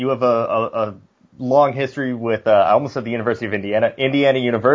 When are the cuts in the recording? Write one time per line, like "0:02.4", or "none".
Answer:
none